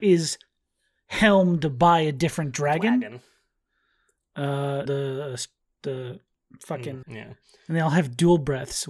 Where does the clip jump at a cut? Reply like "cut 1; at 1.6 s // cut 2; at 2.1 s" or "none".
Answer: cut 1; at 4.9 s // cut 2; at 7.0 s